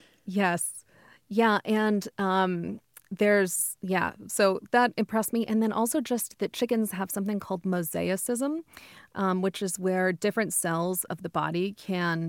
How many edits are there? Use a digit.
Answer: 1